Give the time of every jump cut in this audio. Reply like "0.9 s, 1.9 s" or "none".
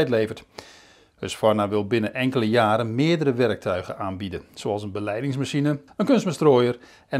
5.9 s